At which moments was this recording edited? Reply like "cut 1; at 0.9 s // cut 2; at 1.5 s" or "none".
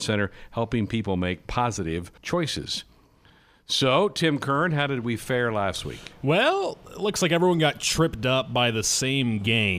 cut 1; at 2.2 s